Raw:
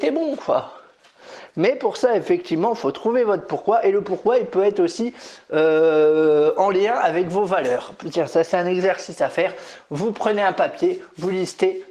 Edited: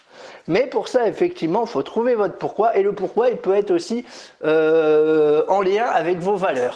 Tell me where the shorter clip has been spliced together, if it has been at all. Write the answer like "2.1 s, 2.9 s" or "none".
none